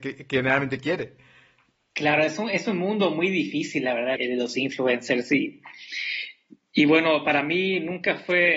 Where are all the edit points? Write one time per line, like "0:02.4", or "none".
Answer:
0:04.2